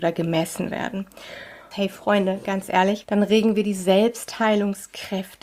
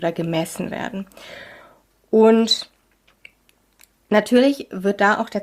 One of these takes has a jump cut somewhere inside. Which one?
first; 2 cuts; at 1.7 s, 3.0 s

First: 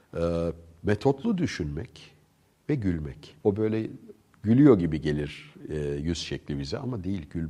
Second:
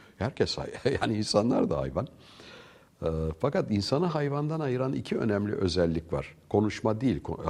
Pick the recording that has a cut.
first; 1 cut; at 3.4 s

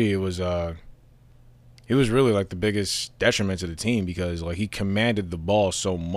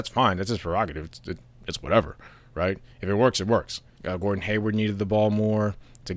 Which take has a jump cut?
second; 1 cut; at 4.0 s

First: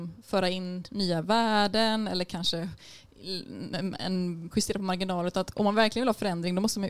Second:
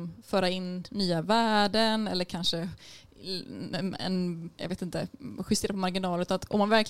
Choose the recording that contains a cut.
first; 1 cut; at 4.5 s

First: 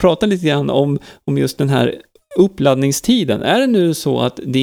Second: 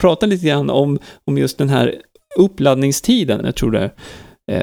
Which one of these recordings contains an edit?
second; 1 cut; at 3.4 s

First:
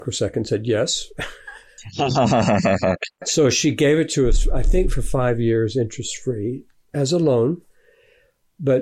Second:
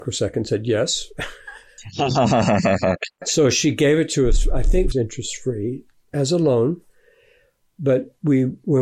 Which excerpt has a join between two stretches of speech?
second; 1 cut; at 4.9 s

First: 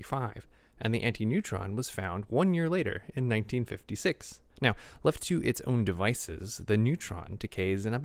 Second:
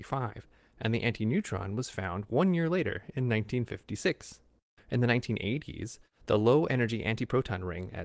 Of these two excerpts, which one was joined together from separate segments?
first; 1 cut; at 4.5 s

